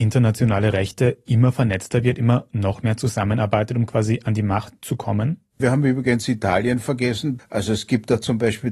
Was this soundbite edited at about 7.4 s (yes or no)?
yes